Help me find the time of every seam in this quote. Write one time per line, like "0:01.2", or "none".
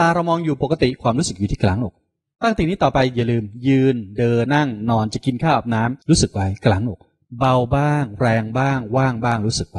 0:04.5
0:06.0